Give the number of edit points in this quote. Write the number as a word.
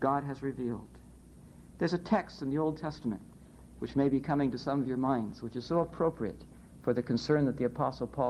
zero